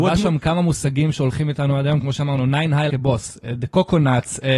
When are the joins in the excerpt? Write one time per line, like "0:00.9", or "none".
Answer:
0:02.9